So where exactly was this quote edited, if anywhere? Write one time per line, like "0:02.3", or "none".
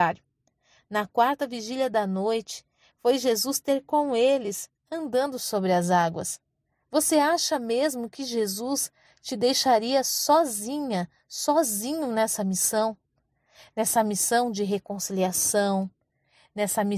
none